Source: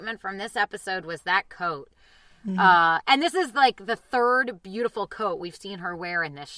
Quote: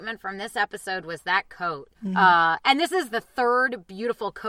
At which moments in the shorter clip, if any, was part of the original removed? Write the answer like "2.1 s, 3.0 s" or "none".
1.9 s, 3.1 s